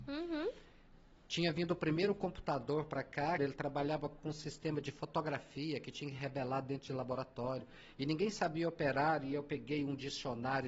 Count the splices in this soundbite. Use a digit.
1